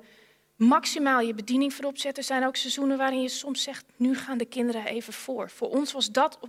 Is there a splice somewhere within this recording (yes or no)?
no